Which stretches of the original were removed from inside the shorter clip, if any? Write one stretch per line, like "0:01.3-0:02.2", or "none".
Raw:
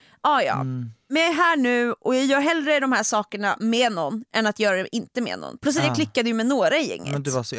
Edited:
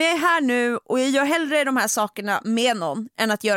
none